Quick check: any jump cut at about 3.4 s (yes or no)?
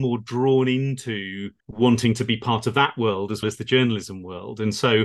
yes